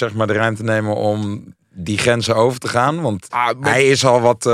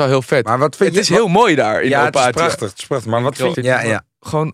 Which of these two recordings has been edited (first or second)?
second